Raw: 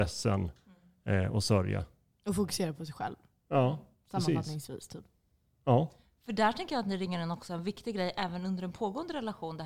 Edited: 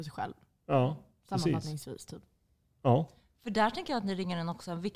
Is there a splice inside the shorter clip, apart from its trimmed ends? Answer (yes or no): no